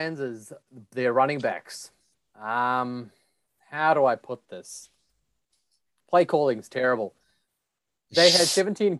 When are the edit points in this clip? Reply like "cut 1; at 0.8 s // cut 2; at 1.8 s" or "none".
none